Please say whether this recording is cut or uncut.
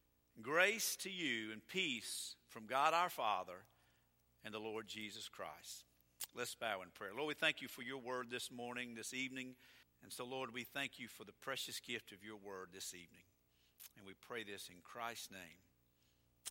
cut